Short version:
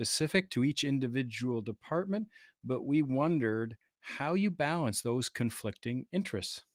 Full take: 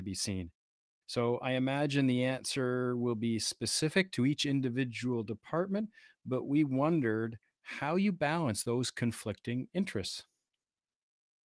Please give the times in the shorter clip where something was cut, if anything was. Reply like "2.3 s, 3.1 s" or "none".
none